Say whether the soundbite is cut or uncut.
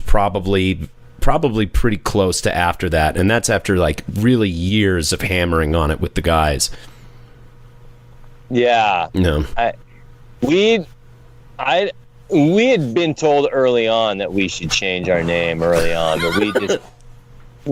uncut